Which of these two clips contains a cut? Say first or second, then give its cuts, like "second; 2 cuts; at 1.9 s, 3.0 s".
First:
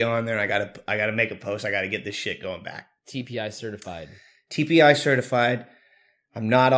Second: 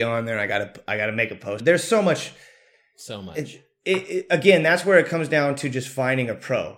second; 1 cut; at 1.6 s